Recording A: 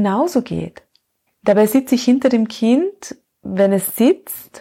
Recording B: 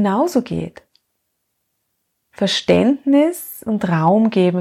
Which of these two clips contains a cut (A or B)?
A